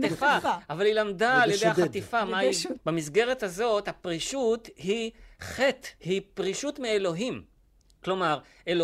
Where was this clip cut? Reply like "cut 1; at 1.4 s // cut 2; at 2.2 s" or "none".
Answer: cut 1; at 2.7 s // cut 2; at 6.0 s